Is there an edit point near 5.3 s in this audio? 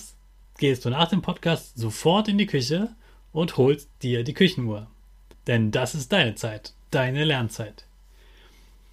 yes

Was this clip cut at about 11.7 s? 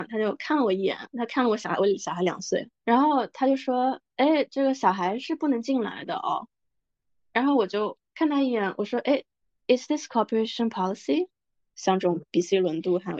yes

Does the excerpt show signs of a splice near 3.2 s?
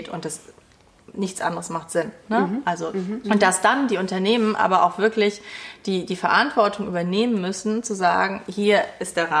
yes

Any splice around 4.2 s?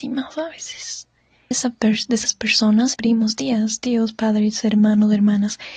no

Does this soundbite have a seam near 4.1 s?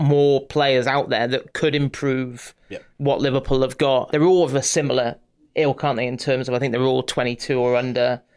yes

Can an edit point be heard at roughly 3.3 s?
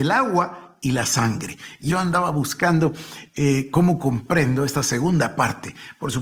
no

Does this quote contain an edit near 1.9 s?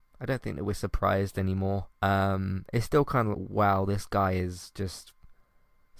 yes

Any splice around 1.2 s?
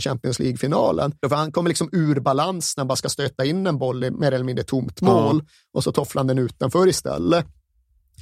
yes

